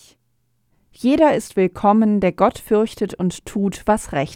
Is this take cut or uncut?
uncut